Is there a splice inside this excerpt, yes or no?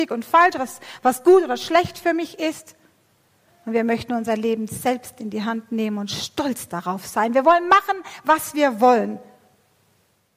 no